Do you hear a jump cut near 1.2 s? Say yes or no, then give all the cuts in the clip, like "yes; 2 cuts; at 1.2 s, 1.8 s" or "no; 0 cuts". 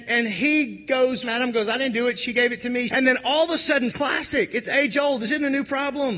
yes; 3 cuts; at 1.2 s, 2.9 s, 3.9 s